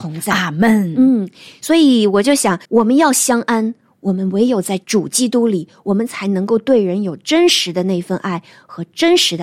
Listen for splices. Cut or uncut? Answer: cut